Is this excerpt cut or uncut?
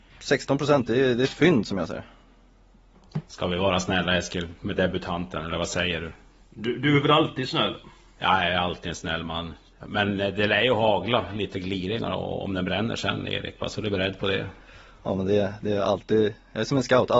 uncut